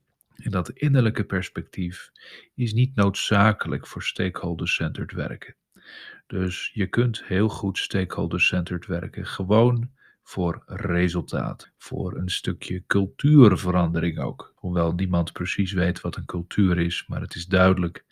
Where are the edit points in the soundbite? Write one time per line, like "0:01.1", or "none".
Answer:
0:11.6
0:14.6